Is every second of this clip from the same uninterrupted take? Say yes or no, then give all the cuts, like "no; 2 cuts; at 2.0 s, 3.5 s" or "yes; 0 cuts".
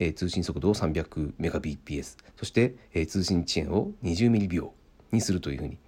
no; 1 cut; at 2.3 s